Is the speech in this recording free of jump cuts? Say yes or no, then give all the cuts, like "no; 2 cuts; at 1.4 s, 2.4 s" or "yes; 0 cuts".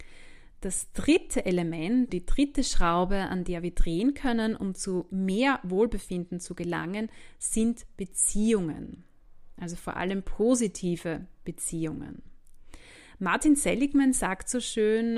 no; 1 cut; at 2.1 s